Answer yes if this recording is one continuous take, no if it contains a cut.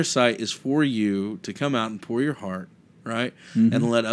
yes